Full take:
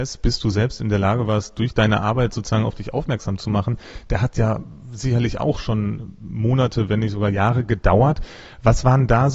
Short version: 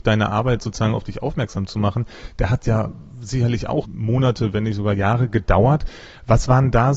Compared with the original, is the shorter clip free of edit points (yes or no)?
no